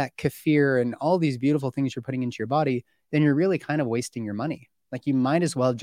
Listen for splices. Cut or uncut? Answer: uncut